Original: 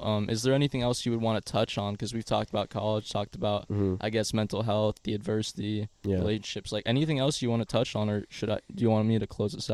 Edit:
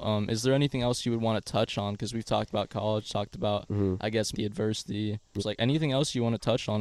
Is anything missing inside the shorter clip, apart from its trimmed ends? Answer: yes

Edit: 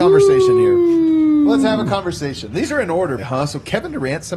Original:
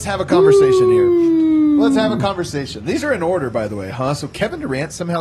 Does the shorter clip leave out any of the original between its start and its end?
yes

